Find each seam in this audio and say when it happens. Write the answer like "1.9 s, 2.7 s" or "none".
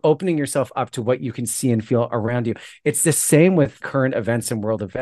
3.8 s